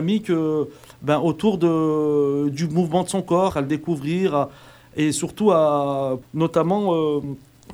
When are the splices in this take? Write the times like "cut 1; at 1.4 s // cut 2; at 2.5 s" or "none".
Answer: cut 1; at 3.5 s // cut 2; at 6.2 s